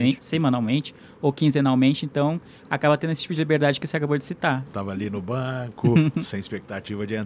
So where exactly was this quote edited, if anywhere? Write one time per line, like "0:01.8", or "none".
0:04.7
0:06.2